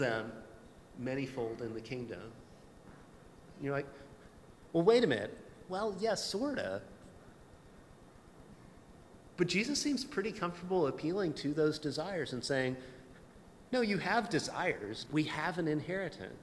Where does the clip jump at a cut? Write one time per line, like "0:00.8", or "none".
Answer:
0:05.7
0:15.1